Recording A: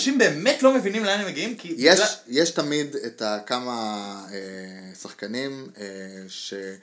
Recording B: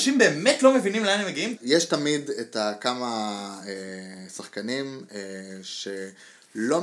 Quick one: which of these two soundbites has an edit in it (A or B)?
B